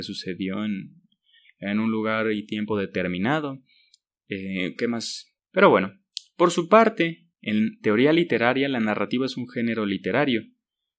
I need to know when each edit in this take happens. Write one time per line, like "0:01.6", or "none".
0:05.4
0:07.3